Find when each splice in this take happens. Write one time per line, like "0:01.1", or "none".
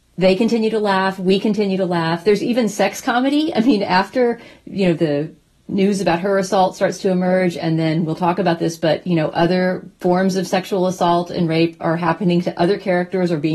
none